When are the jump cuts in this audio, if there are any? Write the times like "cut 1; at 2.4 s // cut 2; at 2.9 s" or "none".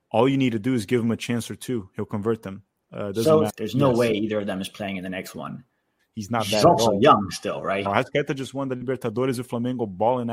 cut 1; at 3.5 s // cut 2; at 6.0 s // cut 3; at 7.8 s